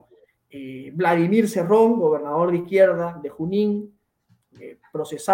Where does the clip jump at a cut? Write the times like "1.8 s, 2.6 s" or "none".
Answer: none

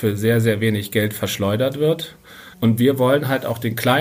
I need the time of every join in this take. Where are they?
2.5 s

